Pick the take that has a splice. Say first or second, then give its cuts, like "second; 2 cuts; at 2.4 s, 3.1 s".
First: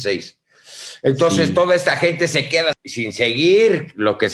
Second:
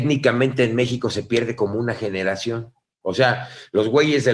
first; 1 cut; at 2.7 s